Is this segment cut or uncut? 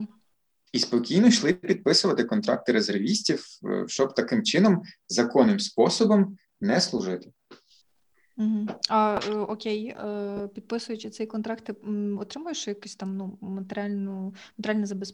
uncut